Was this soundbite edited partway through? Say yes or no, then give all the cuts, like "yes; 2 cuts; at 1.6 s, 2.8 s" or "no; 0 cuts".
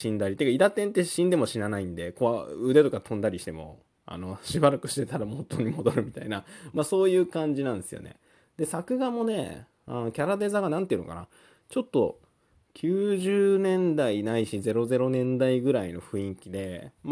no; 0 cuts